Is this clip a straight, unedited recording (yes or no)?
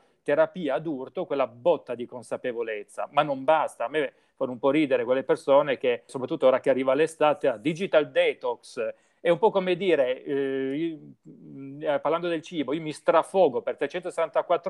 no